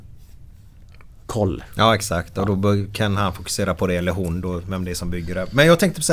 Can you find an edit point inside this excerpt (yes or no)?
no